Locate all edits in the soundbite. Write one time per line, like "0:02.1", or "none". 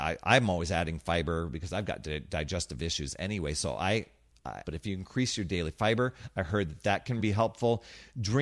0:04.6
0:07.2